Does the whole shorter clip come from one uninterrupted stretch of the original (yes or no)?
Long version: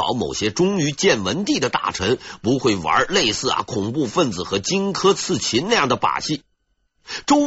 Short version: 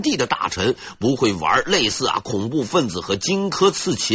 yes